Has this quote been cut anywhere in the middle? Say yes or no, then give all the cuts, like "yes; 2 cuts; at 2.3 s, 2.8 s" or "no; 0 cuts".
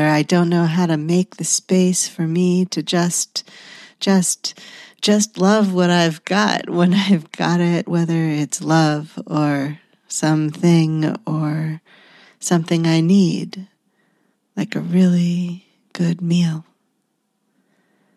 no; 0 cuts